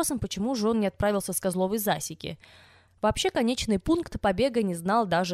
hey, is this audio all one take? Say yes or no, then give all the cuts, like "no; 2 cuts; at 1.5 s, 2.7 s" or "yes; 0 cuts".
no; 1 cut; at 2.9 s